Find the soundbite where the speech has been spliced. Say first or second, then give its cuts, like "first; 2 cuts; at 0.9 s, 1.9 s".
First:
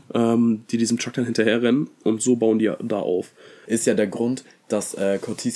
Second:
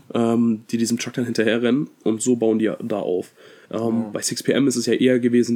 first; 1 cut; at 3.7 s